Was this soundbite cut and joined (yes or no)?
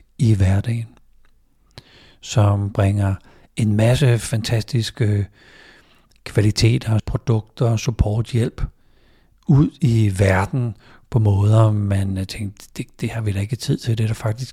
yes